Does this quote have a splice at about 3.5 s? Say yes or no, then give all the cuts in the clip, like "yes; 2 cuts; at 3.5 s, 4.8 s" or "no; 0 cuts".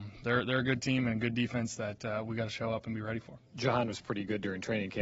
yes; 1 cut; at 3.5 s